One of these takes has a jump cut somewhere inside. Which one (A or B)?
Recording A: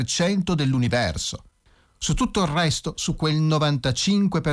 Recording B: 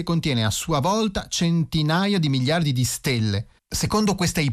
B